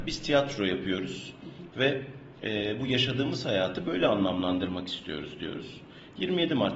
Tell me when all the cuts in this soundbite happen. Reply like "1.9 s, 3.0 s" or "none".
1.7 s